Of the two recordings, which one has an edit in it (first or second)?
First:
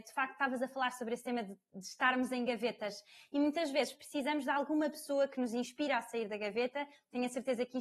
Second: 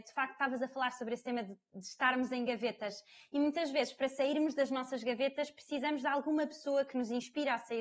first